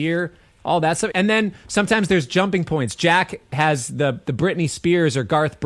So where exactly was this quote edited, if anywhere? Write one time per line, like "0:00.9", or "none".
0:01.1